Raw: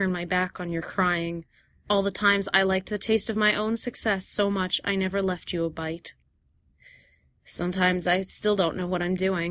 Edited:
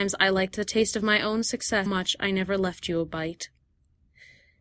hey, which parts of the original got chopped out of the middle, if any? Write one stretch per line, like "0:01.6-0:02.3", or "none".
0:04.2-0:04.5